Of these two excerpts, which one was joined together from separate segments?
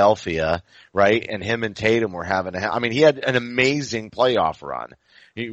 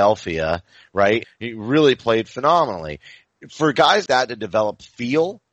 second; 2 cuts; at 1.2 s, 4.1 s

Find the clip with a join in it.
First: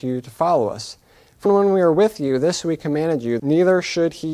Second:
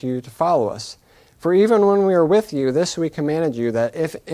first; 2 cuts; at 1.5 s, 3.4 s

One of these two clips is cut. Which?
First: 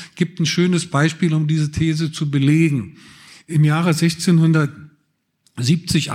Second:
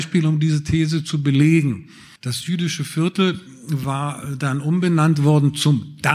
second; 1 cut; at 2.2 s

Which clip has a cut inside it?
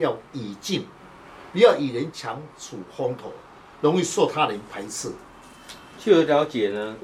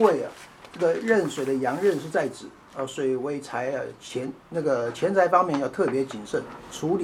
first; 1 cut; at 1.5 s

